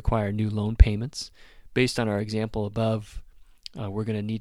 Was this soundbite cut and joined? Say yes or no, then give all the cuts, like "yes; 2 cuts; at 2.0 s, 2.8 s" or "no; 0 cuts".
no; 0 cuts